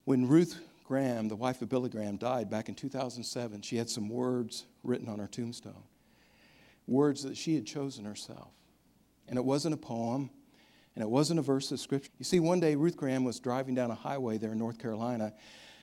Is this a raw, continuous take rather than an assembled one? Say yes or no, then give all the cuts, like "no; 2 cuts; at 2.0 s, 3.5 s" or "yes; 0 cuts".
no; 1 cut; at 12.1 s